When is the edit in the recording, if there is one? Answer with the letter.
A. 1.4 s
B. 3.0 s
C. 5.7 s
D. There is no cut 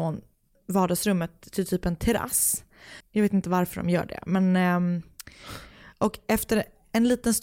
B